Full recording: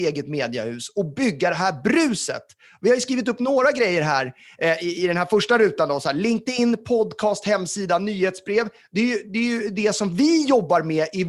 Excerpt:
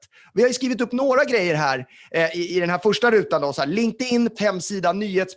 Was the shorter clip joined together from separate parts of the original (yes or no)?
yes